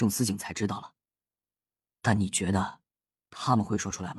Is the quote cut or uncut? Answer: uncut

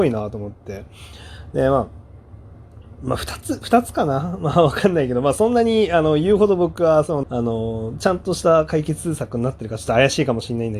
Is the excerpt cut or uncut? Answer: cut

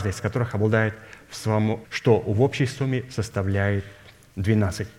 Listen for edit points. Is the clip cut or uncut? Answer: cut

